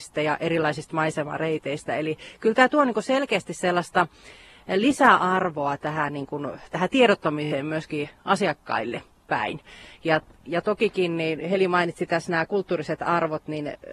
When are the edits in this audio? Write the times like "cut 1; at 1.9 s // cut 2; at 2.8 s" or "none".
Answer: none